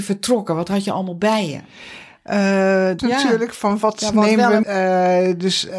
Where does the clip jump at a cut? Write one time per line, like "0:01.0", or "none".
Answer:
0:03.0
0:04.6